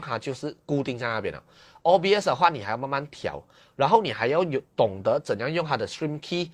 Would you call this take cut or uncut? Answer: uncut